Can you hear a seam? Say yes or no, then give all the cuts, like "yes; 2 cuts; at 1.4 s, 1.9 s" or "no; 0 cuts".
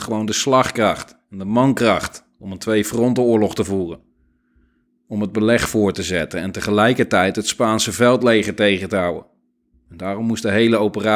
no; 0 cuts